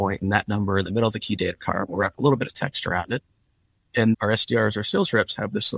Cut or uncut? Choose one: cut